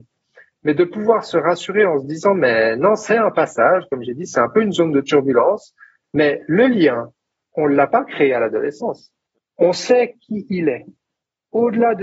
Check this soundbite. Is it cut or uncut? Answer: cut